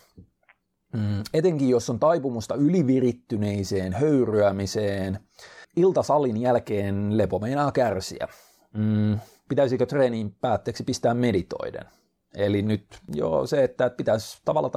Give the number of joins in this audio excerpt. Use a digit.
0